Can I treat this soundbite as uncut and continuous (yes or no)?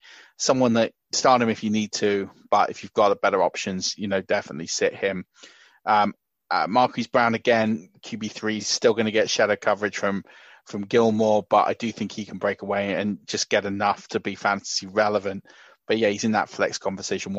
yes